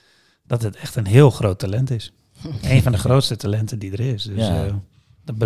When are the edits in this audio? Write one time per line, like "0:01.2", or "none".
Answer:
none